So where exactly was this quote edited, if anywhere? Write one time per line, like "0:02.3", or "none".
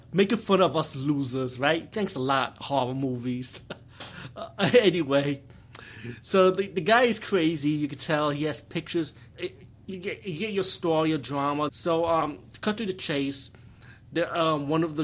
0:09.3
0:11.7